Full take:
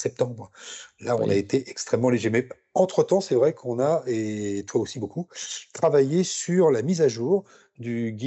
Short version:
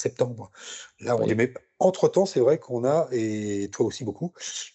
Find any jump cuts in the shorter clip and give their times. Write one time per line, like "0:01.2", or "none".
0:01.3